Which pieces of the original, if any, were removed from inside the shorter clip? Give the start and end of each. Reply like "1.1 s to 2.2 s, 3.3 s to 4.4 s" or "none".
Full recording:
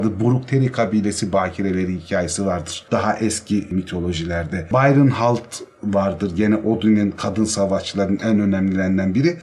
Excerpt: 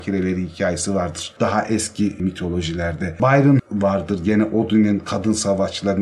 5.1 s to 5.7 s